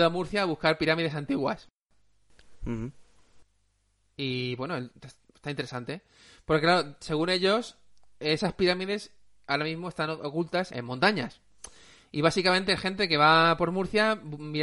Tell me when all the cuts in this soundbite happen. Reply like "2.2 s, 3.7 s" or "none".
10.7 s